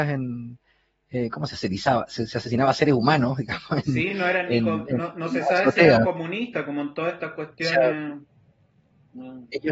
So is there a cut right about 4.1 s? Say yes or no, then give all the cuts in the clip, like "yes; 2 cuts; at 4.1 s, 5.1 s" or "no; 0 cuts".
no; 0 cuts